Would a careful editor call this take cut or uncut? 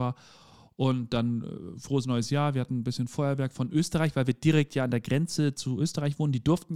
uncut